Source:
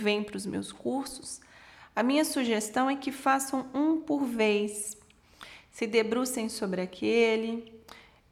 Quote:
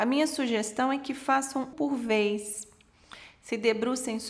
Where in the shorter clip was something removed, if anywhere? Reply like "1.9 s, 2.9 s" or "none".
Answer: 1.7 s